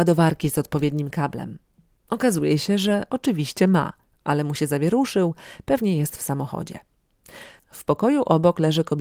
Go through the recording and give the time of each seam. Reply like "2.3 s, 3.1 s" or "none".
7.6 s